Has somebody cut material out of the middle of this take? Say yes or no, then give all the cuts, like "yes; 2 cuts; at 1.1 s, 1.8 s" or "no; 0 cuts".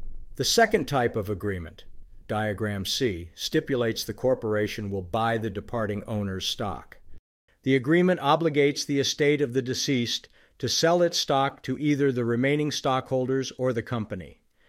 yes; 2 cuts; at 2.2 s, 7.5 s